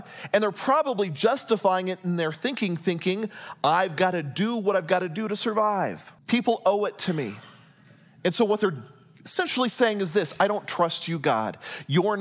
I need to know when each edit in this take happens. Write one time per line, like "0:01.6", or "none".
0:06.2